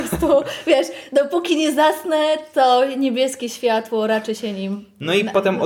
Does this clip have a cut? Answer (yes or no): no